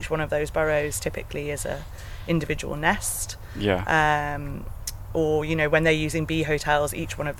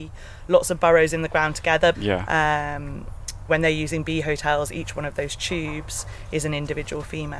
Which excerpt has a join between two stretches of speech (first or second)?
second